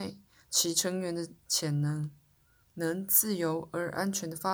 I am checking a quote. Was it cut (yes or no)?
no